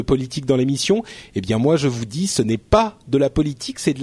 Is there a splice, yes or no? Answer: no